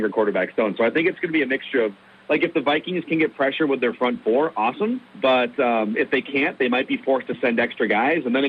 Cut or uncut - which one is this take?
cut